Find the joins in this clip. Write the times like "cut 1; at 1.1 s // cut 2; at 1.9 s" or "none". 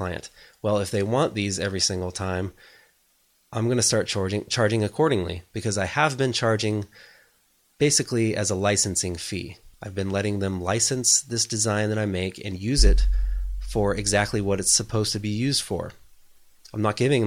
none